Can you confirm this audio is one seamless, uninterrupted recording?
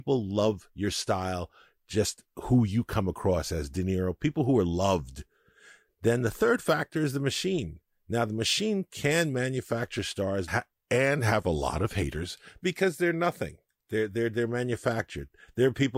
no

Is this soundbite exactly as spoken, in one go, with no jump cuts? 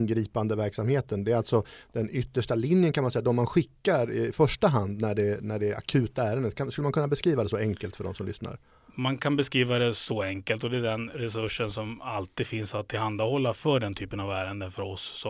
yes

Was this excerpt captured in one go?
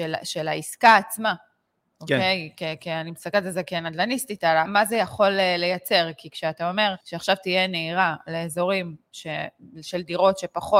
no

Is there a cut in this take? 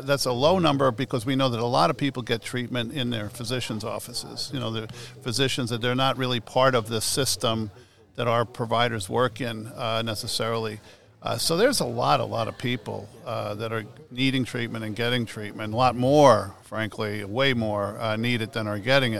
no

